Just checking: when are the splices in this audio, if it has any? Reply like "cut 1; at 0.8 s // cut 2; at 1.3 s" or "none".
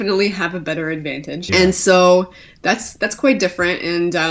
cut 1; at 1.5 s